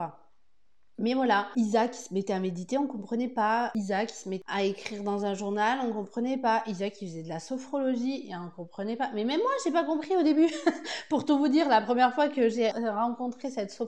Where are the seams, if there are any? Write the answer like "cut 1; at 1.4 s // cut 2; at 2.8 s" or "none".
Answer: cut 1; at 12.7 s